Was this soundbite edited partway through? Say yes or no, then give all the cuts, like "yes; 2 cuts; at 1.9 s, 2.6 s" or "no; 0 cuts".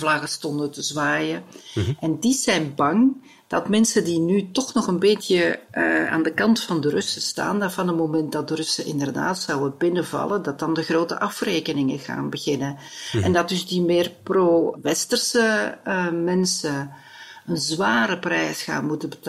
no; 0 cuts